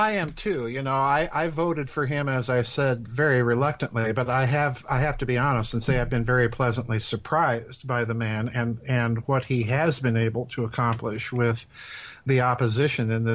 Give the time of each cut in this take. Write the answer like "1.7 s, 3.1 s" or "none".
none